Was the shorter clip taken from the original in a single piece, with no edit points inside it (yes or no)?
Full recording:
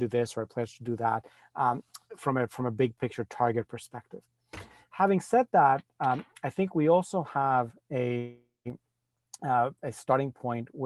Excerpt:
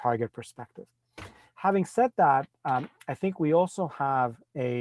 yes